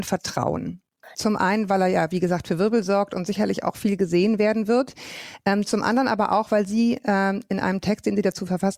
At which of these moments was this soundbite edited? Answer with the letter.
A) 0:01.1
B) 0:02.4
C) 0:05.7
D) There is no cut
A